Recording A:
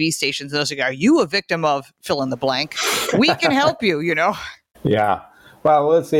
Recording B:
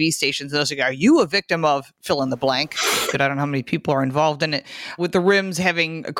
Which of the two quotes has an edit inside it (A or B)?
B